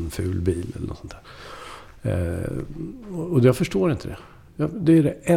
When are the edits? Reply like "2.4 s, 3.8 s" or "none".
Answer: none